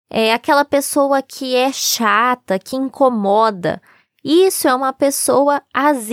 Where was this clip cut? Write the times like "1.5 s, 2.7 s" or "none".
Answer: none